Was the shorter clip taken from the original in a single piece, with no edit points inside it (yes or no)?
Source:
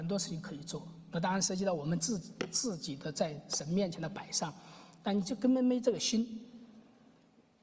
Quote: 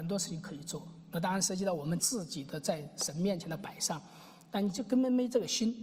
no